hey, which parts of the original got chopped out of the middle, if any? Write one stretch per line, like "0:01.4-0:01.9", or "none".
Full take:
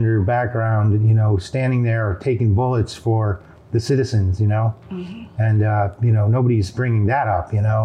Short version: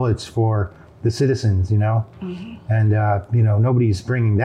none